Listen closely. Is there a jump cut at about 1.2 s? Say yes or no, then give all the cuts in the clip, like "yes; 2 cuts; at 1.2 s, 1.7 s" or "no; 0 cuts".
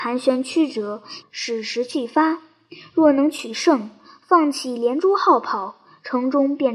yes; 1 cut; at 1.2 s